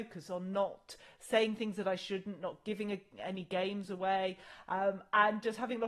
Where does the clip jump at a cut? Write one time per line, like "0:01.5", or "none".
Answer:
none